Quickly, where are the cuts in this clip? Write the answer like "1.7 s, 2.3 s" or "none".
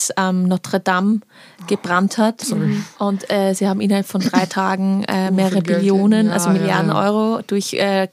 none